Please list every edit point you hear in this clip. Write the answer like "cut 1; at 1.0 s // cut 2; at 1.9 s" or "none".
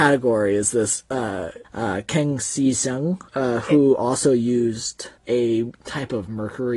cut 1; at 1.6 s // cut 2; at 3.3 s // cut 3; at 5.2 s